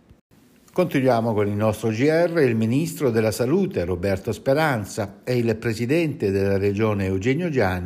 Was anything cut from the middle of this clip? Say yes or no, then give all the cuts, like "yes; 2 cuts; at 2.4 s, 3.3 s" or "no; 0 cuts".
no; 0 cuts